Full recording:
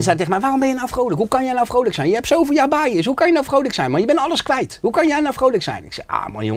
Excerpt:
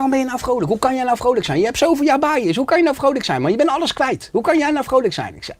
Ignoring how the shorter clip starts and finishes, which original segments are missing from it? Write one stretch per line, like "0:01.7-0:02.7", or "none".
none